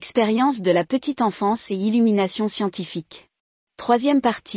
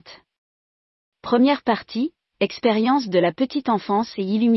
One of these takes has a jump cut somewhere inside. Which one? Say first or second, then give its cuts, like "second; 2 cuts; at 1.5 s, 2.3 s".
first; 1 cut; at 3.6 s